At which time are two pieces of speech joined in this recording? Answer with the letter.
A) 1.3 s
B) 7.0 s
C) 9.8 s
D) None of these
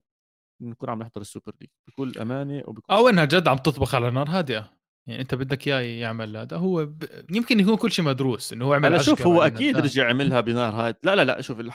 B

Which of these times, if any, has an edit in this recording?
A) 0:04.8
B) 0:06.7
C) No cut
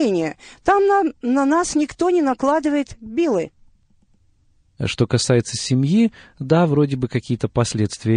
A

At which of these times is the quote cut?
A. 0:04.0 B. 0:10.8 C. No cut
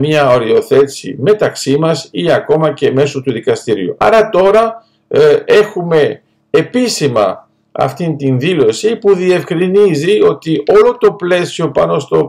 A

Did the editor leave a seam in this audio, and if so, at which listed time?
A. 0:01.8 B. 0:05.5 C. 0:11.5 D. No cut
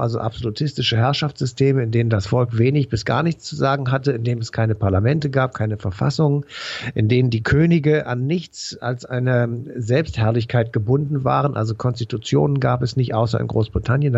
D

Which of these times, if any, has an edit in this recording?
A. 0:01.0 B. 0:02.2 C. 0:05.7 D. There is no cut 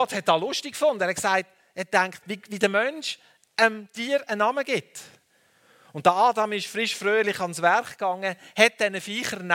B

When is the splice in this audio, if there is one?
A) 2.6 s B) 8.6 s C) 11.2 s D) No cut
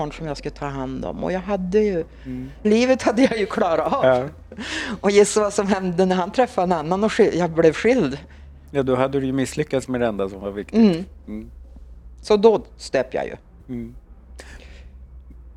A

